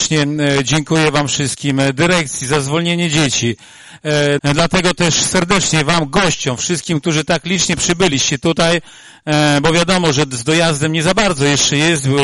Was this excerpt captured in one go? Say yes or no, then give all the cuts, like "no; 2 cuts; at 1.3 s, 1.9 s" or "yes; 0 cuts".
no; 1 cut; at 4.4 s